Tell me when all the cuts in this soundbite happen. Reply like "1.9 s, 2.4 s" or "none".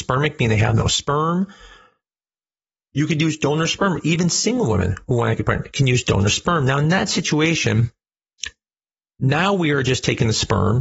none